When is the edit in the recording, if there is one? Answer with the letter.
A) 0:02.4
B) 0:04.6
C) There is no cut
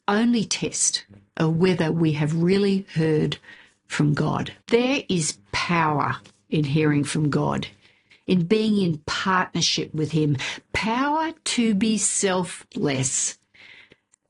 B